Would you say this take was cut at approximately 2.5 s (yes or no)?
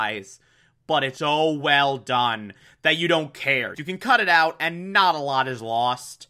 no